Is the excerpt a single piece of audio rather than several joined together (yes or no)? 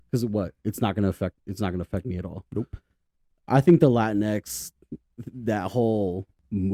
yes